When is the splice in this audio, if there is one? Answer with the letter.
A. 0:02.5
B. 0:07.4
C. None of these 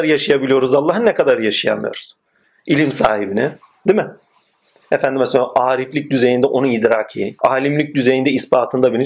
B